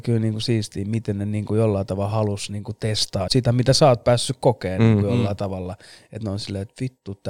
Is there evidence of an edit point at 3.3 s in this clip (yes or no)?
yes